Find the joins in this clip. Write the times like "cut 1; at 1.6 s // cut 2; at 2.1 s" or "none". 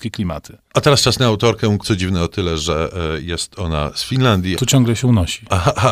cut 1; at 1.8 s // cut 2; at 4.6 s